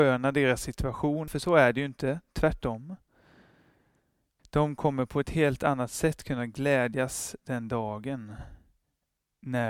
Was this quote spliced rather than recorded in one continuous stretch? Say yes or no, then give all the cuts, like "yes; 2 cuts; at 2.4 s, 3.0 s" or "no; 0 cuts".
yes; 2 cuts; at 1.3 s, 4.4 s